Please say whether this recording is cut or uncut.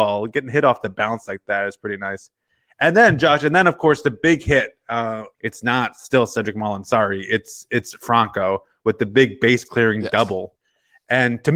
cut